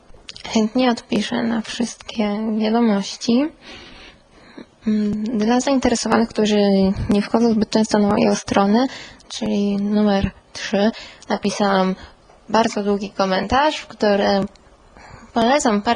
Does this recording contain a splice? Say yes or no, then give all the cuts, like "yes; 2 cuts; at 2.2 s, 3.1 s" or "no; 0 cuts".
yes; 1 cut; at 9.3 s